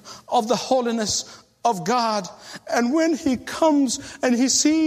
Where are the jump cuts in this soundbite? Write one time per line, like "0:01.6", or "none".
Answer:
none